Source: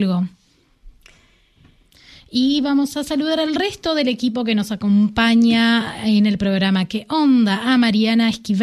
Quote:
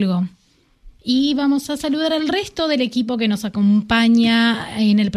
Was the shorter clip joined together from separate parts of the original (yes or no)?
yes